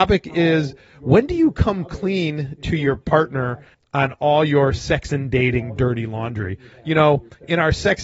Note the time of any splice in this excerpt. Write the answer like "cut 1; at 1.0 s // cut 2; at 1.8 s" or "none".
none